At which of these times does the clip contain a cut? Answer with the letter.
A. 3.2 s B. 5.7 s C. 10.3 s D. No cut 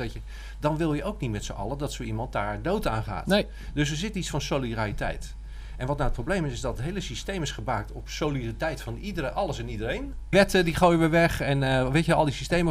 C